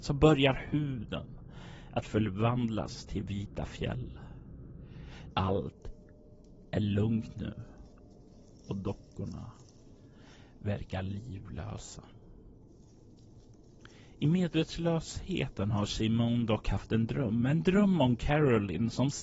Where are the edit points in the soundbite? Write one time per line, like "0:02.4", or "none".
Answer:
0:05.3